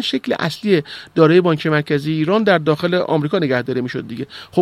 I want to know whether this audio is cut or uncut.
uncut